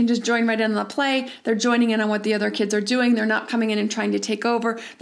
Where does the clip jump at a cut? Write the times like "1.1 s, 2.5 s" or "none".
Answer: none